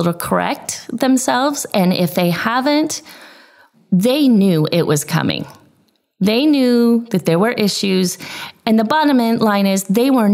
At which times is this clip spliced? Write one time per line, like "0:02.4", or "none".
0:03.7